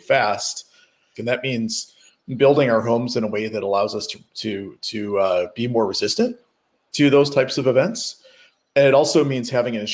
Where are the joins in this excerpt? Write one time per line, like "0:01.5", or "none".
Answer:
0:01.1